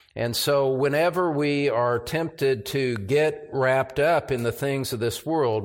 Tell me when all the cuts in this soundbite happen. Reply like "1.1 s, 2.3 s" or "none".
none